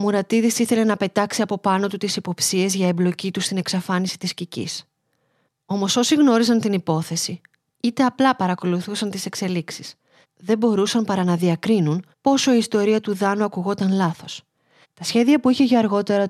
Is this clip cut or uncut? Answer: cut